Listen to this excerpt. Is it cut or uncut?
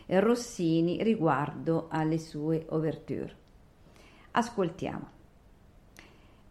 uncut